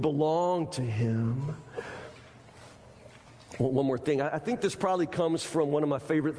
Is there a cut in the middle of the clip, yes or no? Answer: no